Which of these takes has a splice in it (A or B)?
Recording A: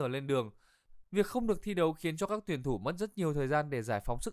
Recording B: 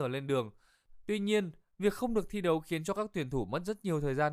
A